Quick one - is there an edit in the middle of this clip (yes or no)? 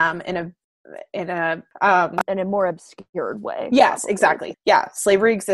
yes